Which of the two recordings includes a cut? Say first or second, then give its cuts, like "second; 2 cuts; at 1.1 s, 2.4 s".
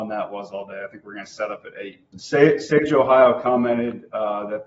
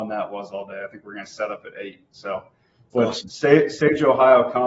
first; 1 cut; at 2.1 s